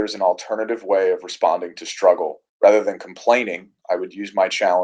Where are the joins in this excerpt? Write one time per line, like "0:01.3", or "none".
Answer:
0:02.5